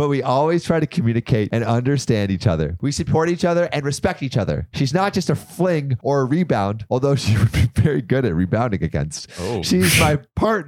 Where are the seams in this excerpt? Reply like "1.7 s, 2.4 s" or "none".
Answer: none